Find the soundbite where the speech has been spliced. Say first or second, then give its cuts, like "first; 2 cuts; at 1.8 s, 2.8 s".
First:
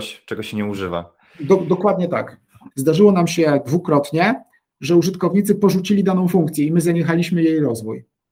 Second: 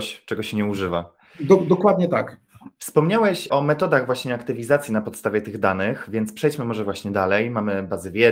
first; 1 cut; at 2.7 s